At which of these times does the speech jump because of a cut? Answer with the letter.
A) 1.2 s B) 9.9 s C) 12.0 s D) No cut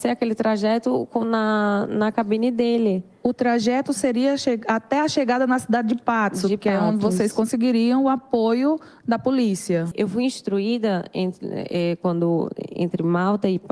D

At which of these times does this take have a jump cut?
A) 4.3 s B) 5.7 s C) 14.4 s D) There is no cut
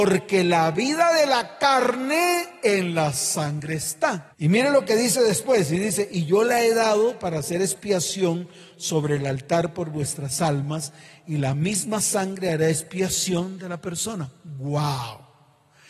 A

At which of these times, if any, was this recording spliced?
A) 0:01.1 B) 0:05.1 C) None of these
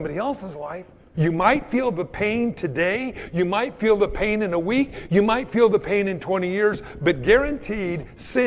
A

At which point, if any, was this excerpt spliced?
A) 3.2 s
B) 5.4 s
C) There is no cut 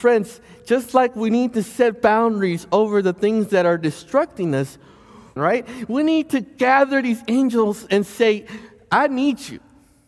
B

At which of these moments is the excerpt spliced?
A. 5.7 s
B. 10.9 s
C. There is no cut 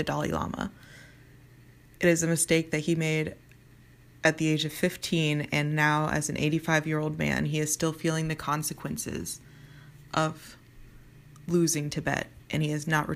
C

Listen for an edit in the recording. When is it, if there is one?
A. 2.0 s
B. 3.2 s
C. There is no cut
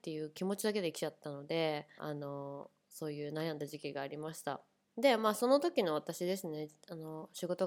A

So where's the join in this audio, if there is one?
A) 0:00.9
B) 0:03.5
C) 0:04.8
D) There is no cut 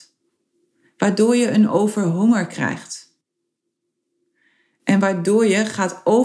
D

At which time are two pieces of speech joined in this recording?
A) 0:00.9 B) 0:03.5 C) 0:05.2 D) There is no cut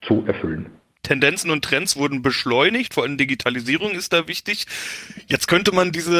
A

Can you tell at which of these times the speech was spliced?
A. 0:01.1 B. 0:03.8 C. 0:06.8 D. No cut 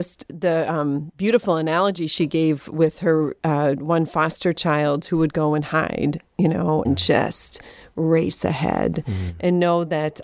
C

